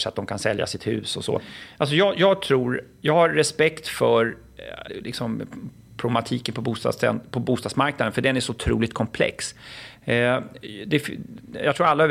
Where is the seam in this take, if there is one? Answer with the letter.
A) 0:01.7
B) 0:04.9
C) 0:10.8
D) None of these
B